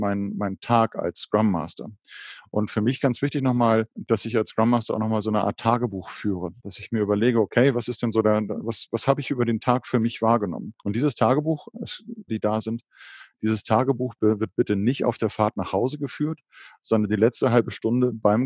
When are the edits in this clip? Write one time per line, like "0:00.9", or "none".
0:06.6
0:12.3

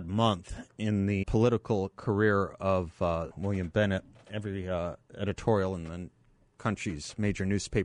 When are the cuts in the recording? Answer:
0:01.2
0:03.3

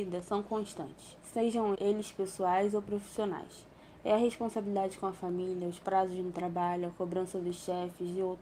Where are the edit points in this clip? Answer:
0:01.7

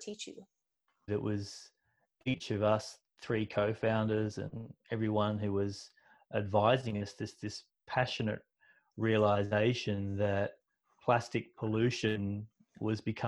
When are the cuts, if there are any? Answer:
0:01.1

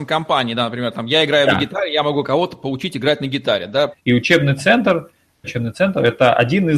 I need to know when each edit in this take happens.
0:03.9
0:05.4

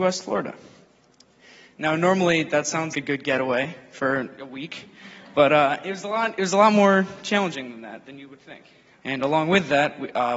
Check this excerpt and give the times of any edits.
0:02.9
0:09.0

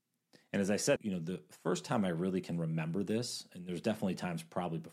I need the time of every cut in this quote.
0:01.0

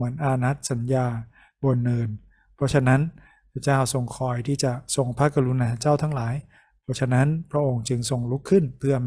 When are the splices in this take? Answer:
none

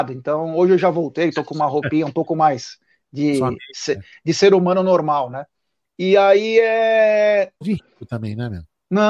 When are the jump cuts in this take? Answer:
0:07.6

